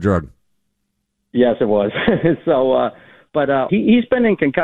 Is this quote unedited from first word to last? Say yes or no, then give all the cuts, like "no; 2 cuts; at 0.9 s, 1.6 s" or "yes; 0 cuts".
no; 1 cut; at 3.7 s